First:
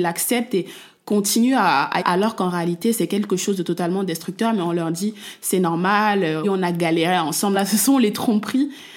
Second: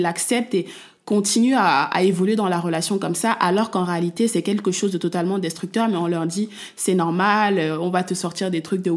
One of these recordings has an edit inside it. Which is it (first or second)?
first